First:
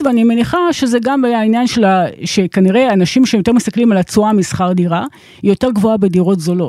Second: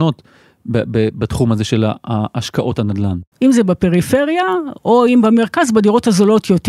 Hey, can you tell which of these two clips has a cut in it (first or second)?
second